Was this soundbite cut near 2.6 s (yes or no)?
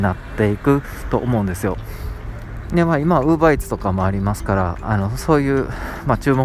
yes